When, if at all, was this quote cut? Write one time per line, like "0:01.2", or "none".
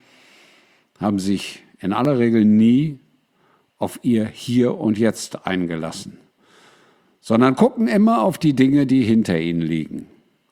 none